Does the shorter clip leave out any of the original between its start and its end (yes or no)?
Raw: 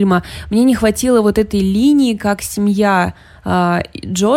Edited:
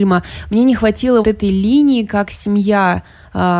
yes